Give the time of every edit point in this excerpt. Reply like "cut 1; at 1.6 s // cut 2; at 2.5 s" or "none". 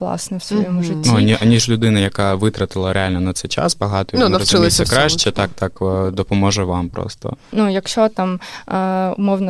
cut 1; at 7.5 s